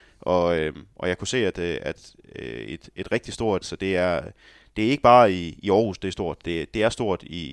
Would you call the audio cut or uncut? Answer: cut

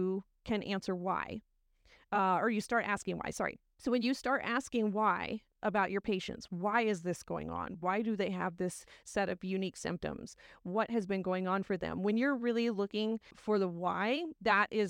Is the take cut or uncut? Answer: uncut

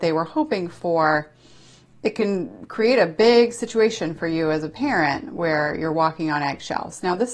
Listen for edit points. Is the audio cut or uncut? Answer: uncut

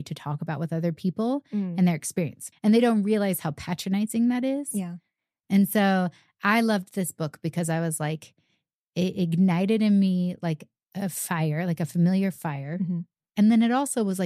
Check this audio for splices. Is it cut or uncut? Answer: cut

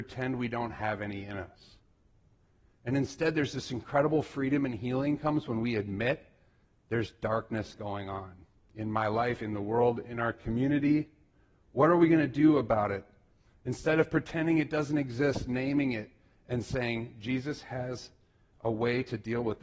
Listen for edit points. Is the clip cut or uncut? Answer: uncut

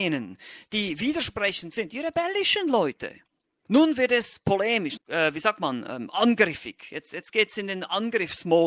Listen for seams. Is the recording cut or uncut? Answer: cut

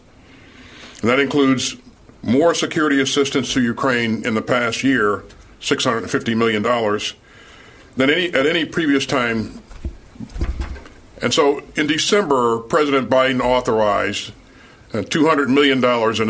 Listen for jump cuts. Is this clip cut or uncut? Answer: uncut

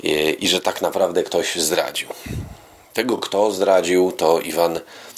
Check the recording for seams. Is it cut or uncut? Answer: uncut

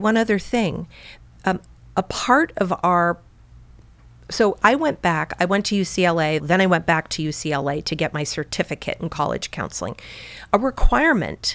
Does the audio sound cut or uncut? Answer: cut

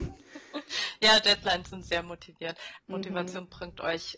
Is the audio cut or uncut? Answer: cut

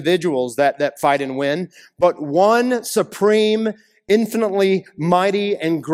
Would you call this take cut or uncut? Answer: uncut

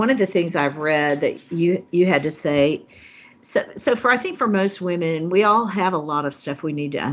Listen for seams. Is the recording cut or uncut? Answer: uncut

